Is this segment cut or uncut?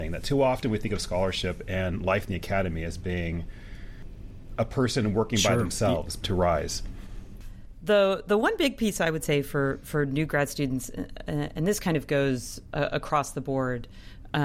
cut